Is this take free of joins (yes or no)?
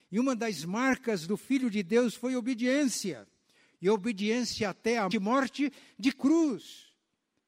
no